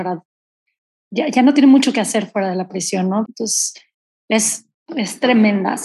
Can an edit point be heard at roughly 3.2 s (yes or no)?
yes